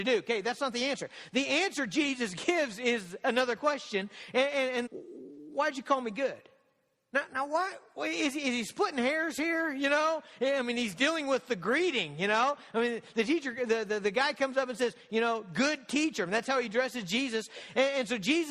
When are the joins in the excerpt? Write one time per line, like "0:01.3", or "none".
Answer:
0:04.9